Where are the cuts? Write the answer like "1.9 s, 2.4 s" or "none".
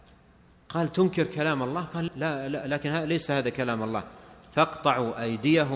2.1 s